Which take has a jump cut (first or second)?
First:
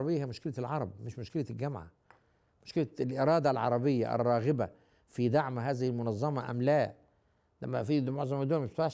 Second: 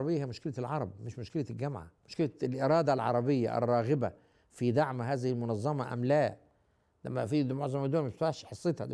second